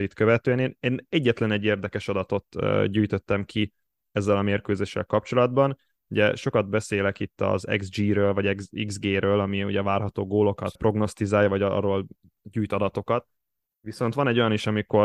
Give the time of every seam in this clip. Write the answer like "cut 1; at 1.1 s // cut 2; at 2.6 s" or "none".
cut 1; at 10.8 s